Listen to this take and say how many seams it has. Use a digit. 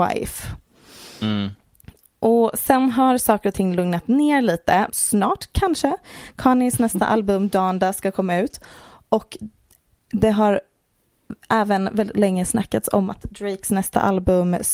1